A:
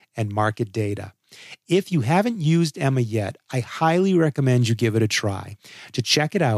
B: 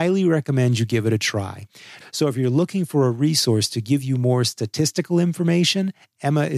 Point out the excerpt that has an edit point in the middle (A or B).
B